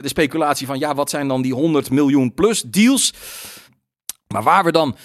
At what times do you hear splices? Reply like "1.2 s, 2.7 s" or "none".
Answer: 3.7 s